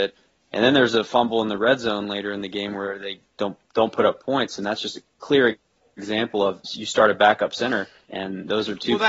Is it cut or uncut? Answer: uncut